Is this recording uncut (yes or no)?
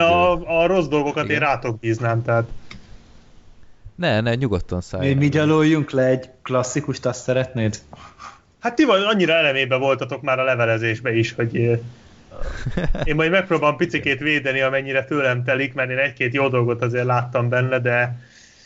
yes